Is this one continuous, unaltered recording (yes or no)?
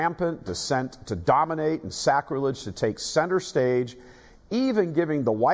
yes